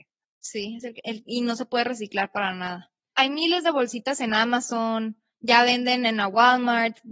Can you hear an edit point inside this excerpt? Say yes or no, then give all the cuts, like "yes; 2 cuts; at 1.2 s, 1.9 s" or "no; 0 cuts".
no; 0 cuts